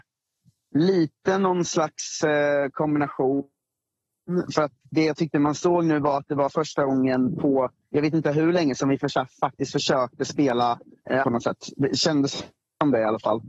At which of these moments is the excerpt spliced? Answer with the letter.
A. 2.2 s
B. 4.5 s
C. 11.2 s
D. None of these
C